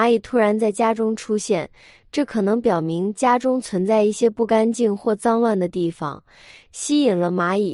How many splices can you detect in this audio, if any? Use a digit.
0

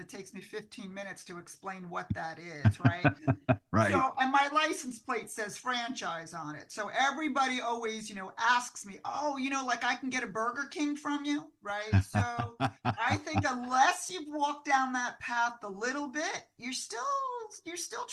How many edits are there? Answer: 0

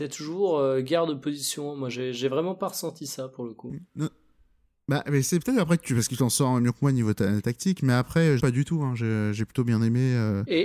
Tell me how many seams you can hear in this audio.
1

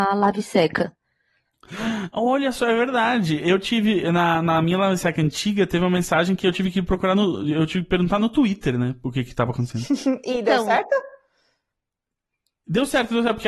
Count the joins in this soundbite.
0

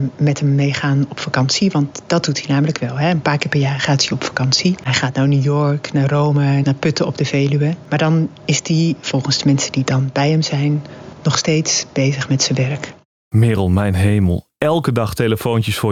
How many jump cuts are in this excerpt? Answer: 1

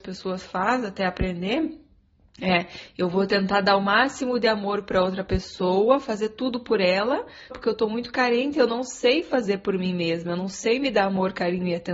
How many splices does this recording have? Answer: 1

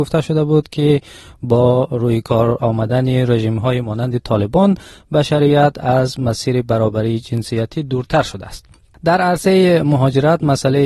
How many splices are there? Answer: 0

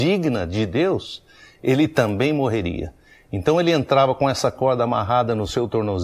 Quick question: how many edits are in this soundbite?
0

